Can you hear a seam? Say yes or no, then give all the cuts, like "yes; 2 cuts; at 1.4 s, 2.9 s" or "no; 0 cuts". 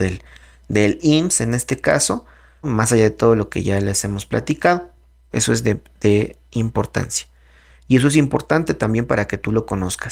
yes; 3 cuts; at 2.6 s, 5.3 s, 7.7 s